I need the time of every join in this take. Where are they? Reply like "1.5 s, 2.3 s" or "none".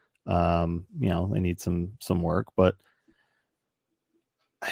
none